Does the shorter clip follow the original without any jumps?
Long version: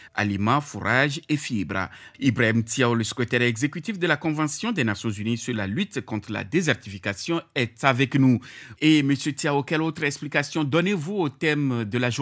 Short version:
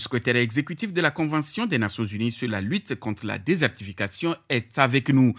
yes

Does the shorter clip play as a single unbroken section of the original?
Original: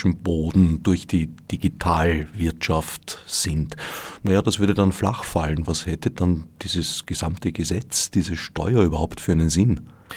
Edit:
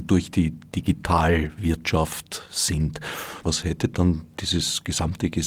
no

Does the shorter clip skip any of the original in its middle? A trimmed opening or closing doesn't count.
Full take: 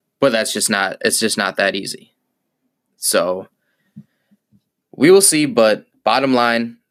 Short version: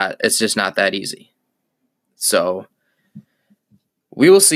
no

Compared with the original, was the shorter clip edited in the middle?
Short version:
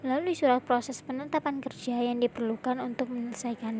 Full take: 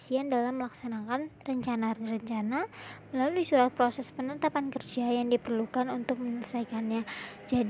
no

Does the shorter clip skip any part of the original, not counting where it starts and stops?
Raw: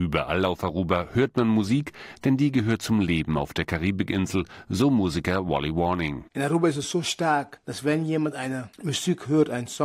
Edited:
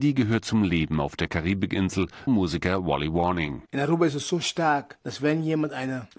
yes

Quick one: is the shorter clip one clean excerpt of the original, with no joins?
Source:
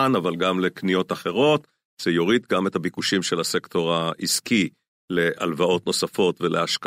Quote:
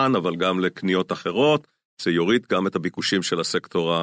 yes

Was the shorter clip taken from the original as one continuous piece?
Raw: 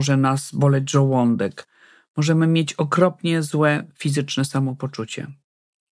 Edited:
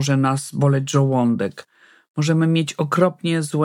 yes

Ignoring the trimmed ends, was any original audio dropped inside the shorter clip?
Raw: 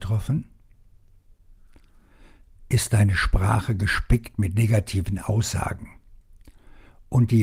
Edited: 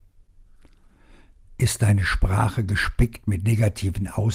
no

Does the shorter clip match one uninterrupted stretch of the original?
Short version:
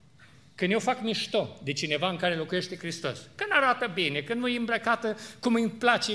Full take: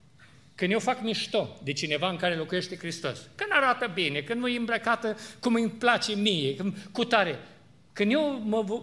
yes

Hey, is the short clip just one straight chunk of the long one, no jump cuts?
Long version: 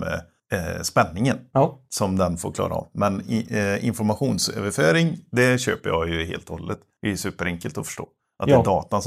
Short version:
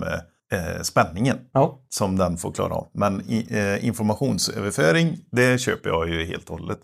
yes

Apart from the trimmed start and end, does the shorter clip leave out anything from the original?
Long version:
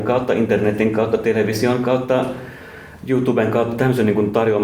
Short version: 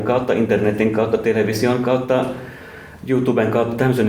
no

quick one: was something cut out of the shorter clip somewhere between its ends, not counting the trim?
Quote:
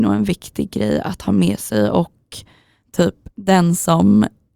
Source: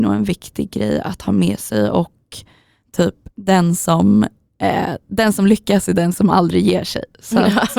no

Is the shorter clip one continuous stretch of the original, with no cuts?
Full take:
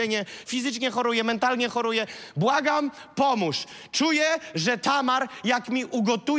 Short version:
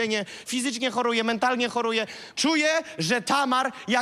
no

